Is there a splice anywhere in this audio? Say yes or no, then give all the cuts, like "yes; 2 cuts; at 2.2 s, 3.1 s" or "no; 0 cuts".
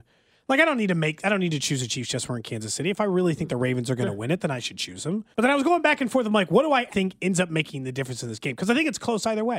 yes; 2 cuts; at 5.3 s, 6.9 s